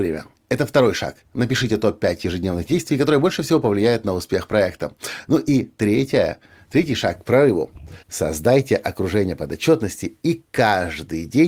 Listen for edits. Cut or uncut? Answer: cut